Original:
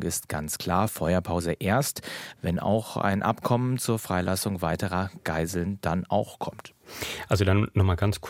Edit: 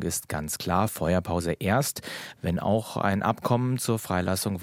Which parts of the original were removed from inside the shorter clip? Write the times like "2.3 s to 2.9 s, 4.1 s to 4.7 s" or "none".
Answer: none